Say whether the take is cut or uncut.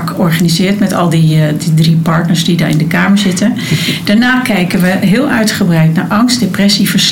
uncut